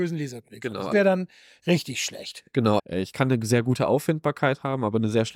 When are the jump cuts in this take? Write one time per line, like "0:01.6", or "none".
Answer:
0:00.9
0:02.8